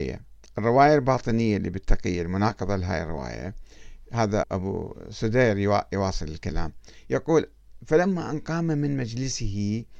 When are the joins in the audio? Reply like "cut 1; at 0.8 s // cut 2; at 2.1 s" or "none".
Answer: cut 1; at 4.4 s